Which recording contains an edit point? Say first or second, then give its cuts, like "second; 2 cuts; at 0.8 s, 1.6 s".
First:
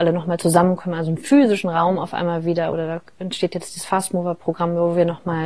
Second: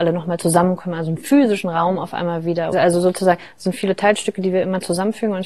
second; 1 cut; at 2.7 s